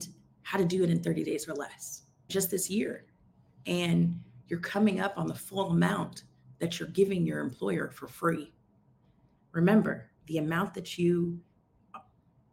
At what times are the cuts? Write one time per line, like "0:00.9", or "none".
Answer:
0:02.3

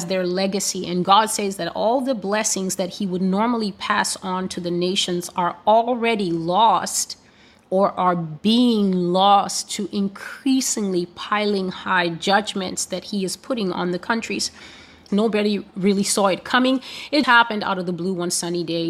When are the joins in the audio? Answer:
0:15.1
0:17.2

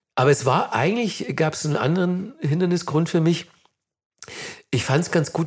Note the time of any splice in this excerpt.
none

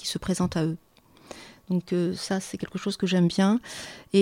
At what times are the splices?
none

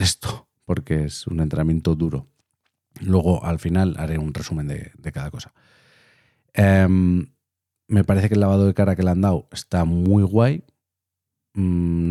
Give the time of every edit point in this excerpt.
none

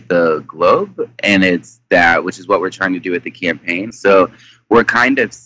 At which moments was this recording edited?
0:03.9

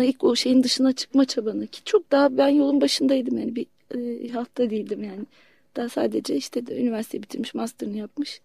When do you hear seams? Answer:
0:04.3

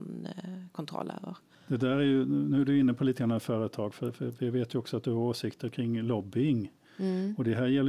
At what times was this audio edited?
0:01.5

